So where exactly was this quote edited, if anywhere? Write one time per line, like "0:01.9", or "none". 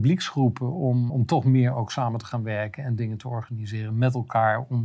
0:01.1